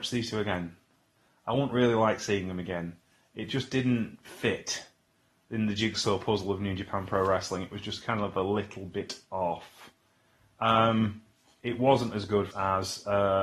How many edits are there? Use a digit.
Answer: 1